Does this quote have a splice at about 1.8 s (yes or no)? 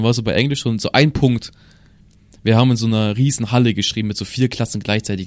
no